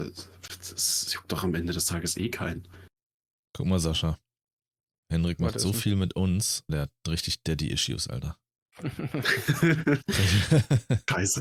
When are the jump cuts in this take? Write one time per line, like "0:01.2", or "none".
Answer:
0:06.7